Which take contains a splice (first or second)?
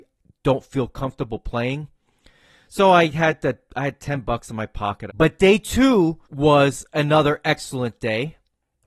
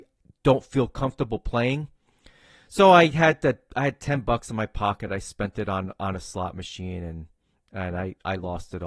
first